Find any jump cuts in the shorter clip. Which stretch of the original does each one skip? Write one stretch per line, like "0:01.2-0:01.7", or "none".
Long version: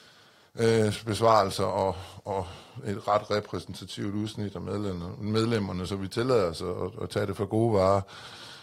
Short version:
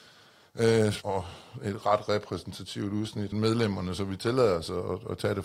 0:01.0-0:02.2
0:04.5-0:05.2